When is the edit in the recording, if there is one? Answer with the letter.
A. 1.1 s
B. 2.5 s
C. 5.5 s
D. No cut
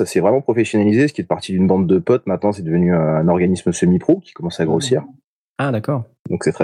C